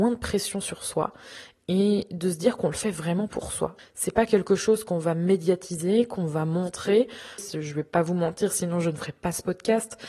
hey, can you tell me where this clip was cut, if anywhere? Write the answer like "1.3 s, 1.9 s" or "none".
3.8 s, 7.4 s